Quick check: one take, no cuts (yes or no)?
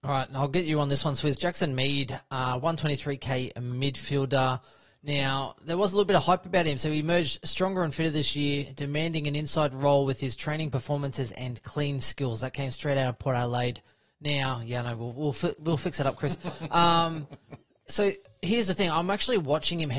yes